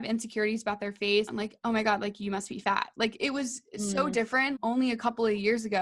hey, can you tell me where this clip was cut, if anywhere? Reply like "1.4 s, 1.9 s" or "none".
1.3 s, 4.6 s